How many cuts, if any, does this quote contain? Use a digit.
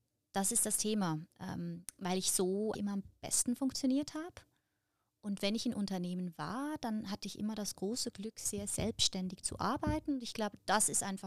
1